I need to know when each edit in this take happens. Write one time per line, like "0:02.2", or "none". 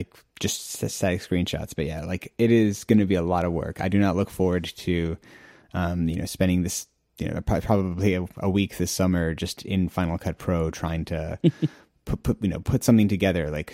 none